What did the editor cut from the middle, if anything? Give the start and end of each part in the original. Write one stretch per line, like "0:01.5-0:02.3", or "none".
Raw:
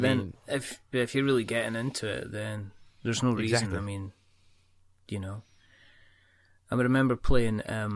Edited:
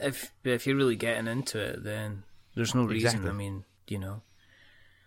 0:04.2-0:05.0